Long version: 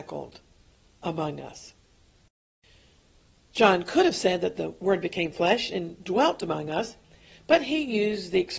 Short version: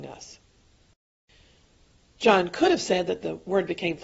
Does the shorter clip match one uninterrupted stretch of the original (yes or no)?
yes